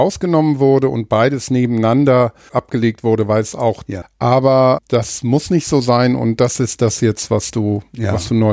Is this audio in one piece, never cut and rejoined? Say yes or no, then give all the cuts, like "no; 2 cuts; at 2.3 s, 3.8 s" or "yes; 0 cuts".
no; 1 cut; at 4.0 s